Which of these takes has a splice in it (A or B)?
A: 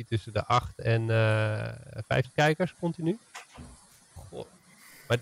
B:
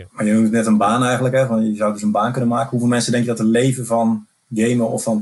A